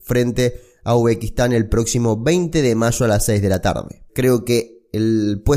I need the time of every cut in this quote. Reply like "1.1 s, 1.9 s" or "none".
4.1 s